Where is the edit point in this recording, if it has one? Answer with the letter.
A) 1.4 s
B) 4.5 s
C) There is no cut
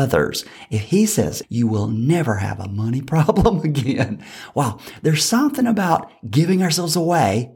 A